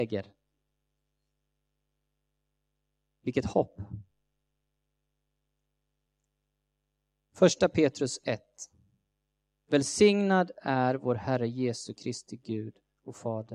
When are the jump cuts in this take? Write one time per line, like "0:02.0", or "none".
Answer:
none